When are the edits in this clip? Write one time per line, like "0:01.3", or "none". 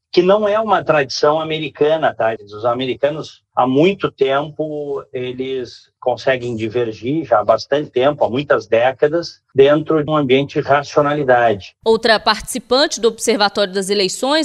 0:02.4
0:10.1